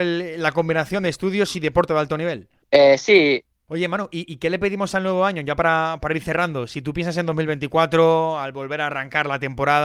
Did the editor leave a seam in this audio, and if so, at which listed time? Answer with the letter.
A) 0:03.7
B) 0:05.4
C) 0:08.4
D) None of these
A